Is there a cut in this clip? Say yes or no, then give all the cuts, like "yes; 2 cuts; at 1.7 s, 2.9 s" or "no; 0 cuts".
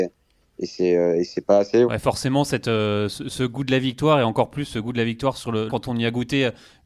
yes; 2 cuts; at 1.8 s, 5.7 s